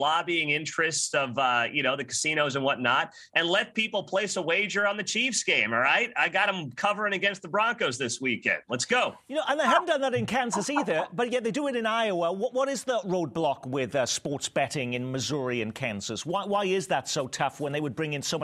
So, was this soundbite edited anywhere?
no; 0 cuts

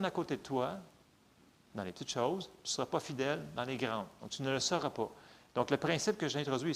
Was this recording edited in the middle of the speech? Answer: no; 0 cuts

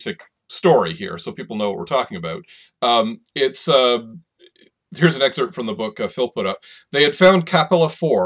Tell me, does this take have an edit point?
no; 0 cuts

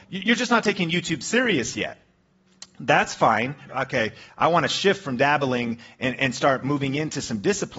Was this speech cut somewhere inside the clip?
yes; 1 cut; at 3.7 s

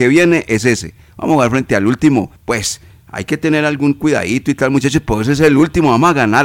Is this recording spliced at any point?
yes; 1 cut; at 2.4 s

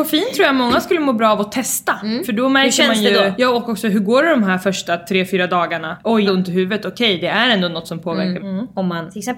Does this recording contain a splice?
yes; 2 cuts; at 6.3 s, 8.4 s

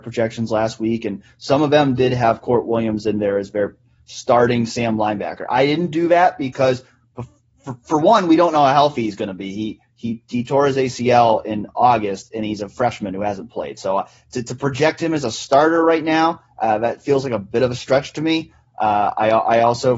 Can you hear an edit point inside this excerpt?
no; 0 cuts

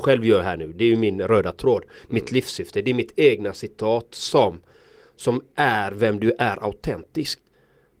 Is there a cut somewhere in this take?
no; 0 cuts

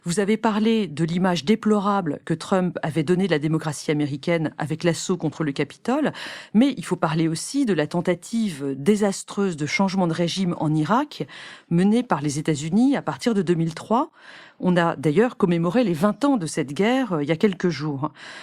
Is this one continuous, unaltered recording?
yes; 0 cuts

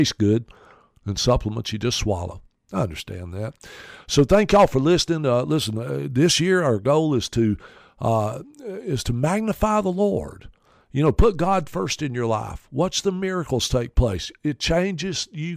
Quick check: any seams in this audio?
no; 0 cuts

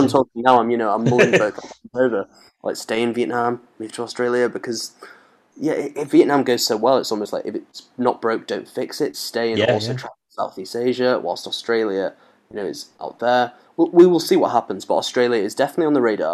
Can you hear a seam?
no; 0 cuts

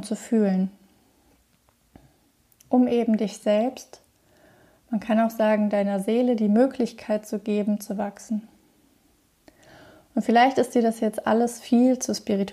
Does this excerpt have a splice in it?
no; 0 cuts

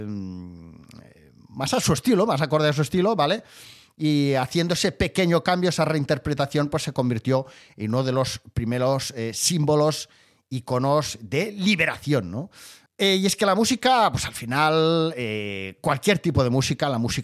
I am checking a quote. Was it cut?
yes; 1 cut; at 12.9 s

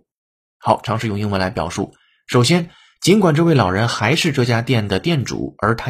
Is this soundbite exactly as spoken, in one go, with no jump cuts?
yes; 0 cuts

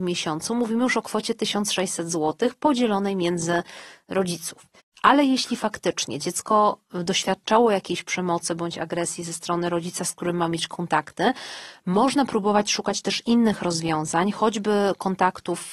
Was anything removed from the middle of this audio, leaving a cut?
yes; 1 cut; at 4.9 s

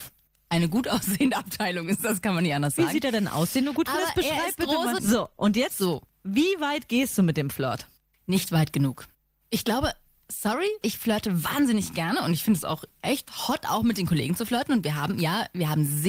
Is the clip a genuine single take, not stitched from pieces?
no; 2 cuts; at 5.0 s, 10.8 s

